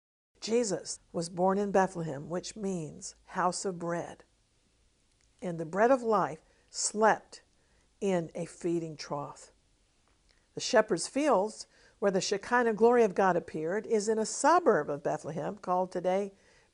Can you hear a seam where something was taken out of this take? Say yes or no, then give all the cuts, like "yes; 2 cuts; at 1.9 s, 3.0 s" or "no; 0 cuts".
yes; 1 cut; at 1.0 s